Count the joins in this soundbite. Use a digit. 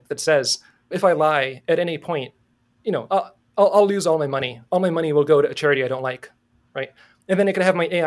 0